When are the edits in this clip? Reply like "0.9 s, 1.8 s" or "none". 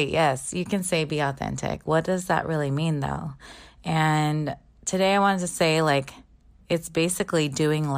none

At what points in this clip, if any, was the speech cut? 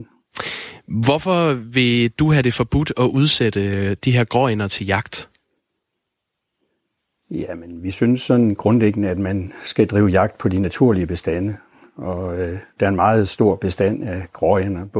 none

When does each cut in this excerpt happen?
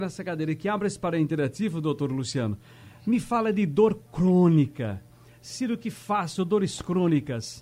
none

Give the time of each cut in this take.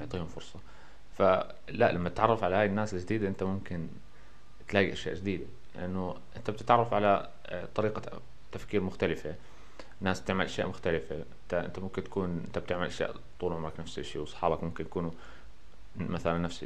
11.5 s

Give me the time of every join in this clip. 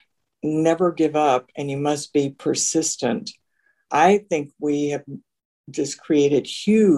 none

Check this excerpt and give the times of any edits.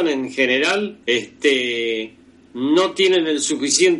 1.0 s

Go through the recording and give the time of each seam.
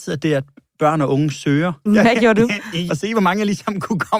1.9 s, 2.9 s

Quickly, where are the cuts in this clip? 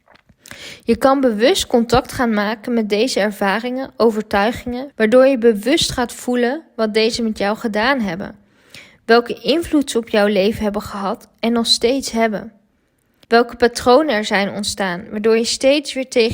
4.9 s, 13.2 s

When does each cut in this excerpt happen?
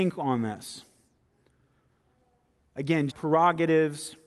3.1 s

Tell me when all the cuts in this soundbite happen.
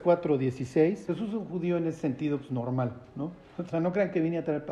1.1 s, 3.7 s

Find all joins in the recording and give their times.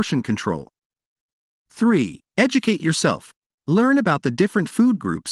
2.3 s, 3.6 s

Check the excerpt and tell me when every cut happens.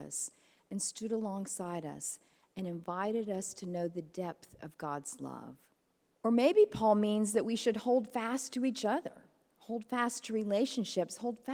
6.1 s

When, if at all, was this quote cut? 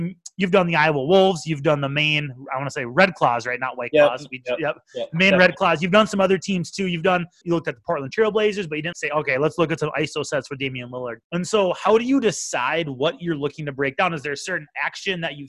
7.4 s, 8.9 s, 11.2 s

